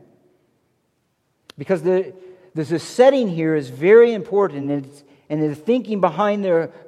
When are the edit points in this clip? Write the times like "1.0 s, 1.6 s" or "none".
none